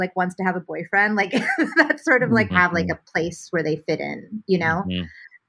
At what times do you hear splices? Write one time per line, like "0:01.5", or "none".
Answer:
0:02.5